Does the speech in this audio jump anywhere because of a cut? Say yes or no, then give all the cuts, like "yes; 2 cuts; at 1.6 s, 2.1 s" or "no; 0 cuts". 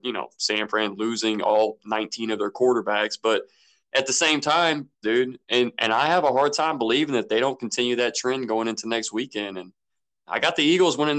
yes; 1 cut; at 5.0 s